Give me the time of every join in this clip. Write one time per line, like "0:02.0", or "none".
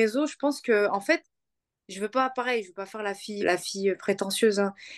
0:03.4